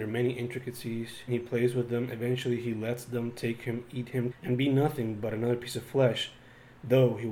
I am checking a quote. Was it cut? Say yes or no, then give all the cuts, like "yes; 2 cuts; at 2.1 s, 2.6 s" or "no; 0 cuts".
yes; 2 cuts; at 1.3 s, 4.3 s